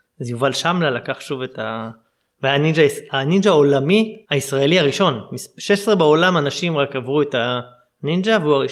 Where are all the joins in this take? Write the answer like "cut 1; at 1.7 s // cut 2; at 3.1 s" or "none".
cut 1; at 4.2 s